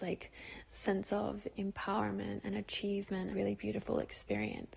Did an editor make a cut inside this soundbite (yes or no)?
yes